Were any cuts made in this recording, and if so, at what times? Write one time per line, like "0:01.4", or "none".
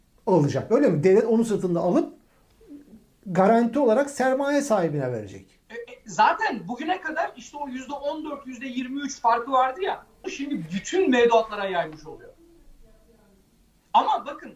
0:05.6
0:10.2